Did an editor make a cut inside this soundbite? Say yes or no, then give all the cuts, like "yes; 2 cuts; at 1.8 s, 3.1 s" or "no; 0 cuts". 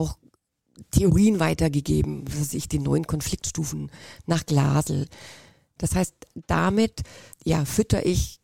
yes; 2 cuts; at 5.8 s, 7.3 s